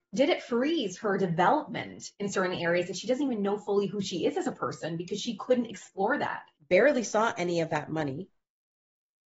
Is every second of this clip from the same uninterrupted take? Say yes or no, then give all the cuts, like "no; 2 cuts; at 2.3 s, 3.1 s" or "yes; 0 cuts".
no; 1 cut; at 6.5 s